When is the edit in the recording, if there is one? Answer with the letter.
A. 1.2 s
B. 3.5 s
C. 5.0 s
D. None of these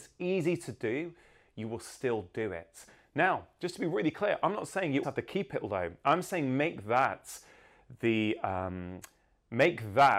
C